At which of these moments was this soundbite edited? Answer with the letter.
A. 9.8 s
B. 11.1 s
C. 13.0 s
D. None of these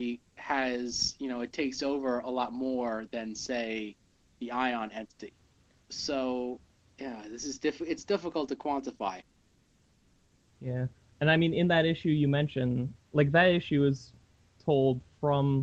C